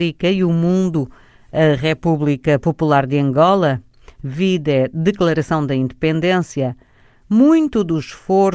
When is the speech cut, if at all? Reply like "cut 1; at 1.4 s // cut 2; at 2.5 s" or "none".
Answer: none